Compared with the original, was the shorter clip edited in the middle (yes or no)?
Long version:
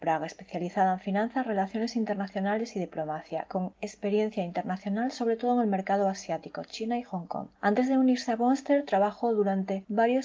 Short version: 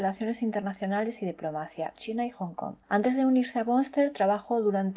yes